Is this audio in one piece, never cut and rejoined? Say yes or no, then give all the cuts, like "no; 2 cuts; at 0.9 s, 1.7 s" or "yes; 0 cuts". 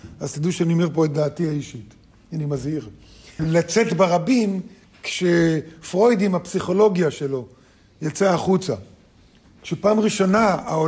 no; 1 cut; at 3.4 s